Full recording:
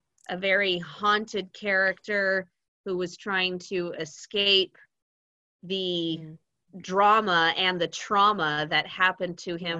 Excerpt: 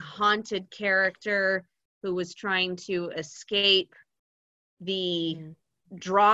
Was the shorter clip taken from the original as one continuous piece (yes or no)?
yes